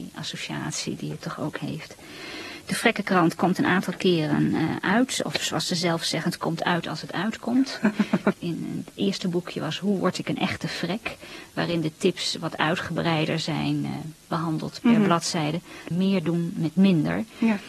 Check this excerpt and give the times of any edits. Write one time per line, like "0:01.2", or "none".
0:08.3
0:15.9